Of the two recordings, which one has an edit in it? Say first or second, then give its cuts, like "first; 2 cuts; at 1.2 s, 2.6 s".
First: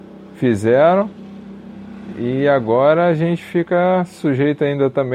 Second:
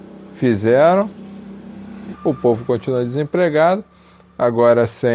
second; 1 cut; at 2.1 s